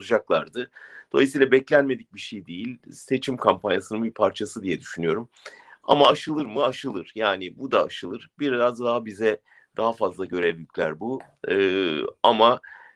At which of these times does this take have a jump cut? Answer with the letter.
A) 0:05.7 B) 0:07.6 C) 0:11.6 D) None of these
B